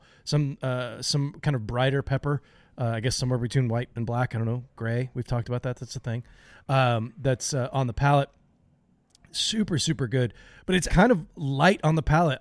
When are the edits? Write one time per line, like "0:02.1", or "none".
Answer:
0:10.9